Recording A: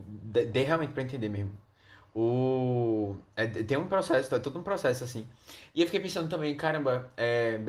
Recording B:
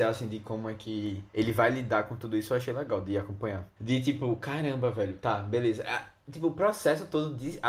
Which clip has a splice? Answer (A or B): B